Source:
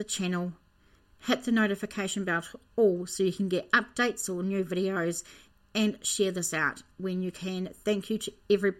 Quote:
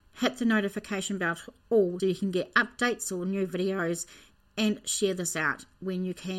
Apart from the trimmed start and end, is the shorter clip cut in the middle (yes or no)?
yes